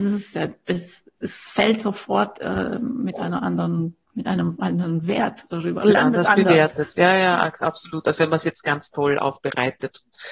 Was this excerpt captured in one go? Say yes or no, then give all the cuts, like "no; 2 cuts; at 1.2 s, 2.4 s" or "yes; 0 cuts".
no; 1 cut; at 4.0 s